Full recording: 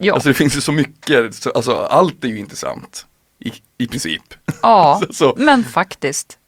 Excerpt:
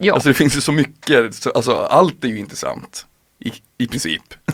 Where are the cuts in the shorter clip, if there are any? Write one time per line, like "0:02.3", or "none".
none